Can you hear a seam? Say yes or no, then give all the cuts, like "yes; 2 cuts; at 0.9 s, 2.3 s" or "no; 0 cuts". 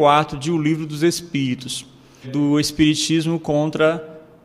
yes; 1 cut; at 2.2 s